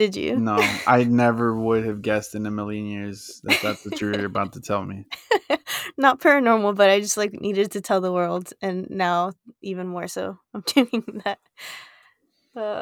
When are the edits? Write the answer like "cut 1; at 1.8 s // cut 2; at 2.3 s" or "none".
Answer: none